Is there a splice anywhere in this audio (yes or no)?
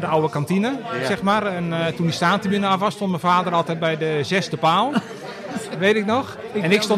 no